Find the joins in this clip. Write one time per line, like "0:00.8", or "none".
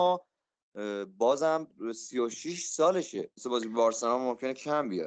0:03.3